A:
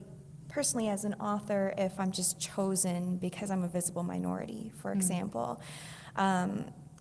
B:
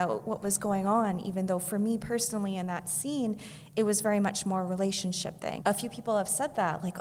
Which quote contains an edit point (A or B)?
B